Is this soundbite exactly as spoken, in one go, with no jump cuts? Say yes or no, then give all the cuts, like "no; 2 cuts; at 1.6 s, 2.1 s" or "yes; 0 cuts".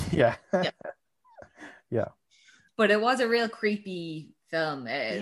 yes; 0 cuts